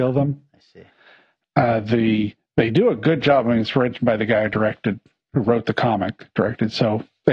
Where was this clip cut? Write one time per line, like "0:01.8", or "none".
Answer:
none